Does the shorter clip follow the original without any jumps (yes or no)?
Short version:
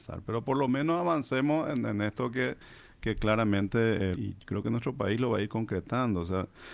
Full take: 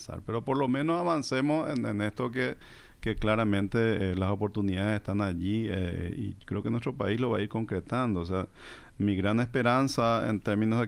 no